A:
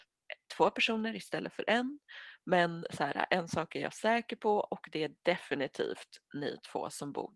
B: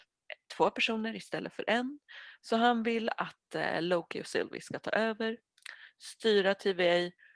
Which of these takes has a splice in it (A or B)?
B